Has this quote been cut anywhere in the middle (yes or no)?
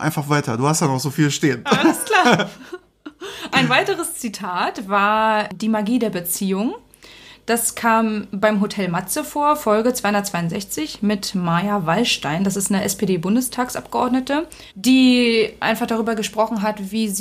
yes